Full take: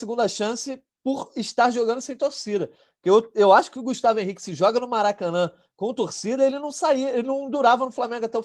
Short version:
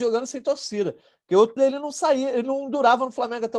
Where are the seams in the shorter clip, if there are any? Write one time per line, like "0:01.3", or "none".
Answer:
0:01.6